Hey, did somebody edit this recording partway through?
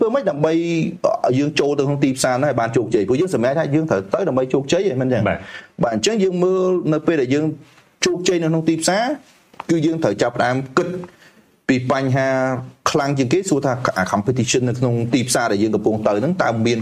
no; 0 cuts

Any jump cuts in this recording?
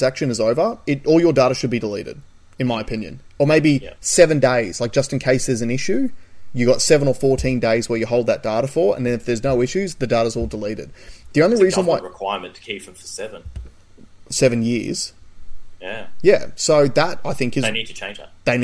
no; 0 cuts

